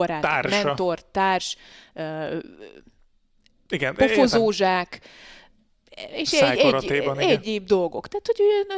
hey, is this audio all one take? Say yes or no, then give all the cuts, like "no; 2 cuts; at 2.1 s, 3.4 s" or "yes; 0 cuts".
no; 1 cut; at 7.4 s